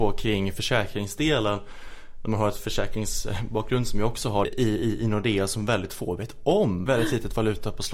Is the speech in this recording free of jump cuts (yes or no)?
no